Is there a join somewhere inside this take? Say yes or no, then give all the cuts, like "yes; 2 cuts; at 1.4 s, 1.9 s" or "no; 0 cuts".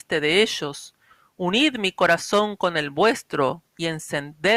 no; 0 cuts